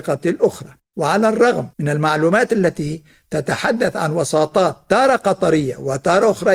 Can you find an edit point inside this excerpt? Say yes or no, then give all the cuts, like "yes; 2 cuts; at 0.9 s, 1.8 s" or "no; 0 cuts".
yes; 1 cut; at 1.7 s